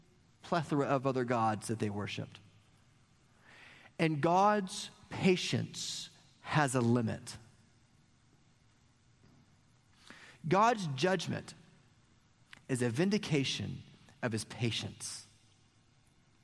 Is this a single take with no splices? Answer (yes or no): yes